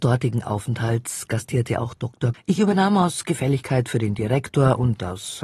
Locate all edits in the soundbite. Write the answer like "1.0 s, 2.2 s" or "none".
2.3 s